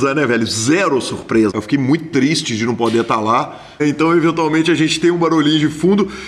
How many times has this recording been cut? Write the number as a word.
two